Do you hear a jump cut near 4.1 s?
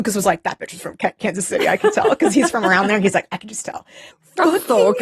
yes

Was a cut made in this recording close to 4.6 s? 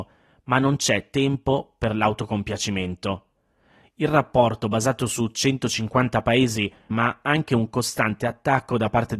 no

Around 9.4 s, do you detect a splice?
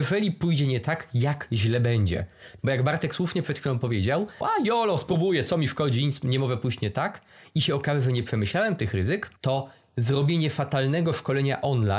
yes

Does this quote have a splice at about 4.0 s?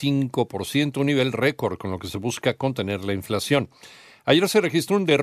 no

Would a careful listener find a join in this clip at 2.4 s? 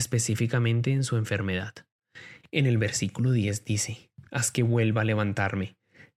yes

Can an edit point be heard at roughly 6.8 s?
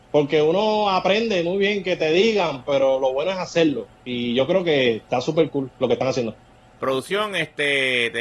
yes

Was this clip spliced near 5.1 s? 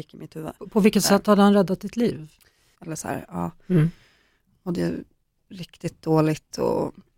no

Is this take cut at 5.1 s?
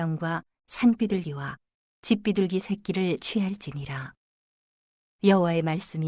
yes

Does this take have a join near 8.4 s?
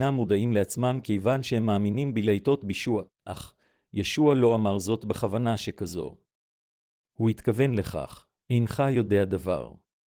yes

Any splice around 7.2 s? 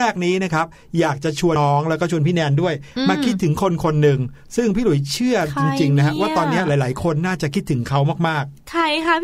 no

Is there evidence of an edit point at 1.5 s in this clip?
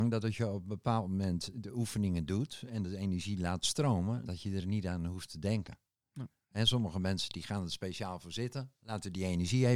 yes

